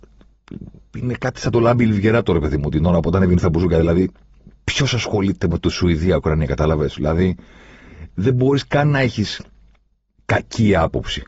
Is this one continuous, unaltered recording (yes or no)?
yes